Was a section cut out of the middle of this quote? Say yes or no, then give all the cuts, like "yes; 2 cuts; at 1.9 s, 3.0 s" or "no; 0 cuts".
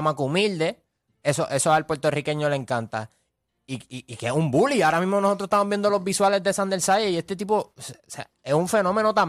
no; 0 cuts